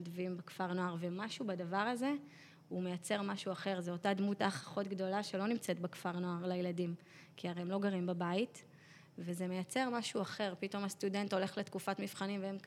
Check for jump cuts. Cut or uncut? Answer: uncut